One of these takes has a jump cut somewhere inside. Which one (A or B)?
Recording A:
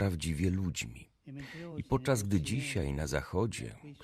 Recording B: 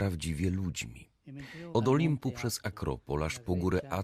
B